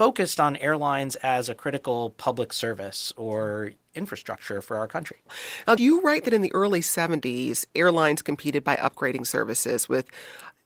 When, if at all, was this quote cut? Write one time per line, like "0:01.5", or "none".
0:05.8